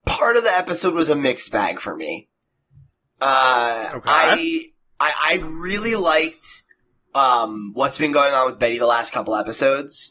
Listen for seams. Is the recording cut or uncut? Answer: uncut